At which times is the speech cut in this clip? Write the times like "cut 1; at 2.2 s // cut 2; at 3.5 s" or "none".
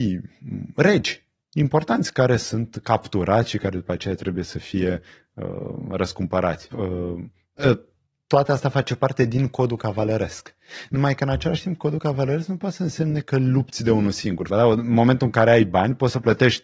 cut 1; at 6.7 s // cut 2; at 14.5 s